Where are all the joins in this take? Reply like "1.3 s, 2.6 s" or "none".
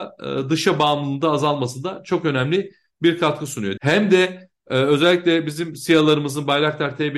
3.8 s